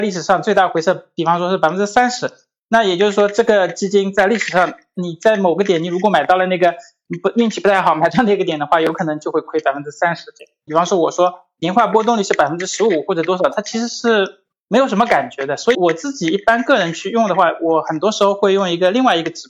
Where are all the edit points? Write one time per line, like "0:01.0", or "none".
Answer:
0:10.7
0:15.7